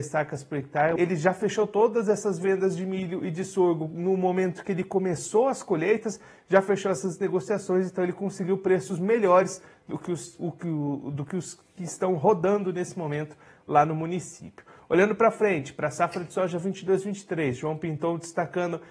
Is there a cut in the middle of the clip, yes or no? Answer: yes